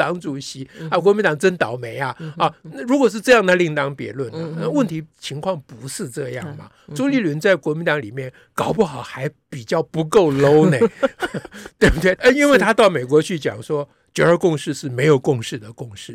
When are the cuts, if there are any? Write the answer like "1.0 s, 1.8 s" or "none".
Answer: 12.2 s